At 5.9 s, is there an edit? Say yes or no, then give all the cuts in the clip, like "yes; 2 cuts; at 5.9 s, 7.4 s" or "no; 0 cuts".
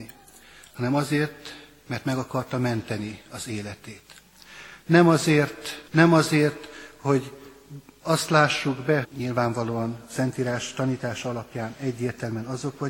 yes; 3 cuts; at 4.8 s, 5.9 s, 9.0 s